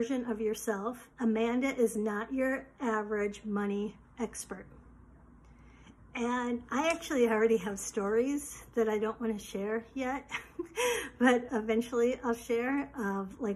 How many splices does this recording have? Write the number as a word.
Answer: two